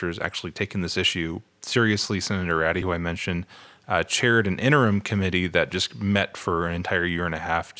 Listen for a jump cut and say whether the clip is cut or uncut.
uncut